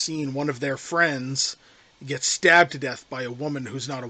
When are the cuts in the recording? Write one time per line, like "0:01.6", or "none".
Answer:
none